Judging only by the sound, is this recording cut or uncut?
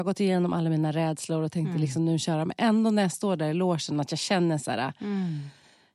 uncut